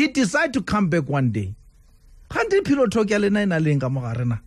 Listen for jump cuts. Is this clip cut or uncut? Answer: uncut